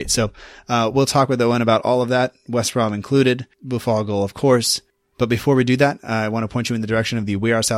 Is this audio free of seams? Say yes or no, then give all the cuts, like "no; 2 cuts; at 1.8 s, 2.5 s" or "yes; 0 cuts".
yes; 0 cuts